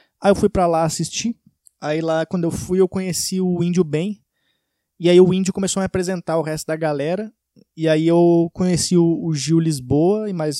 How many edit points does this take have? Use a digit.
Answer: 0